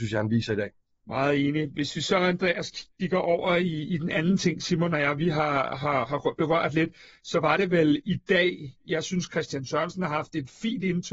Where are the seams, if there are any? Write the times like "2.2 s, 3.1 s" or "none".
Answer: none

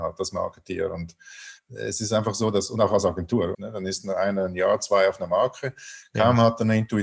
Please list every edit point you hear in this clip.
3.5 s

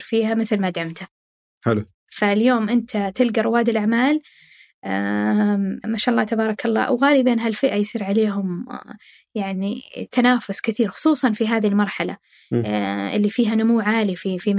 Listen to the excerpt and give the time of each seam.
5.8 s

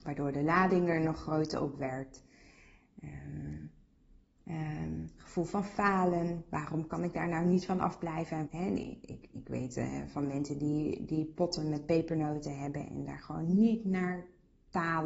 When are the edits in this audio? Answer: 4.4 s, 8.5 s

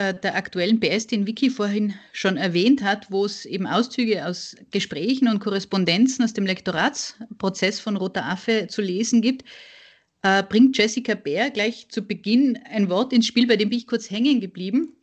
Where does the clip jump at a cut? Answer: none

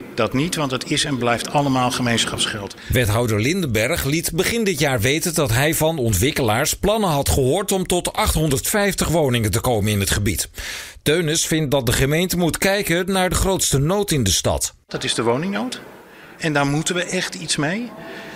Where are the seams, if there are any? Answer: none

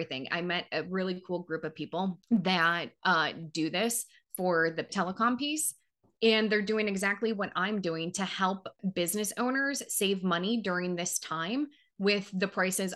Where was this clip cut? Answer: none

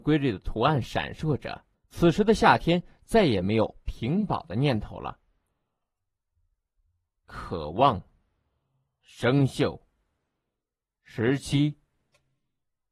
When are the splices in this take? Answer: 1.7 s

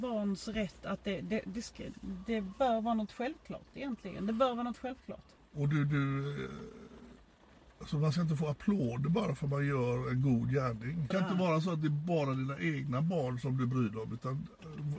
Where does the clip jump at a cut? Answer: 5.4 s, 11.1 s

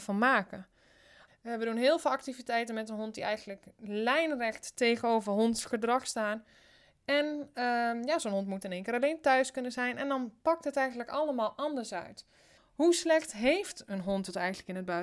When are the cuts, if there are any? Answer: 1.3 s, 12.6 s

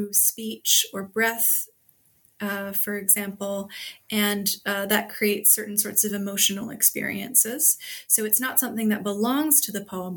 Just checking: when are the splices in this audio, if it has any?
8.0 s

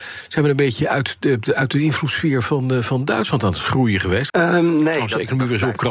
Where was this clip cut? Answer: 4.3 s

